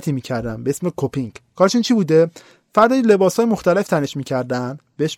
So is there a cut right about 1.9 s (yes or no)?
no